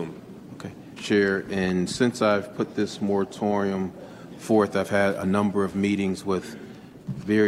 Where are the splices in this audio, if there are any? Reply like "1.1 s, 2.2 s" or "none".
1.0 s

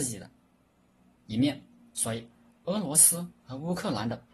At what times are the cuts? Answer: none

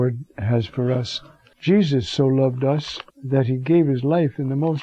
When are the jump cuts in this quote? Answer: 1.5 s, 3.1 s

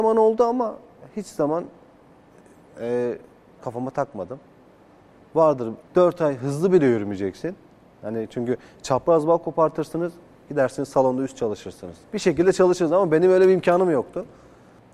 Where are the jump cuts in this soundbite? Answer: 3.6 s, 5.8 s, 12.0 s

